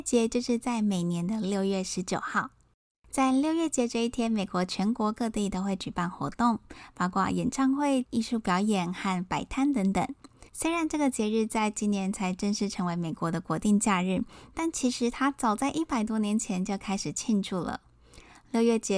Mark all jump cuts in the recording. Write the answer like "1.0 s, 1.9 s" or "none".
8.0 s, 10.5 s